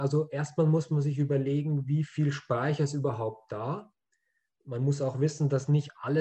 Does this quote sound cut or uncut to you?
uncut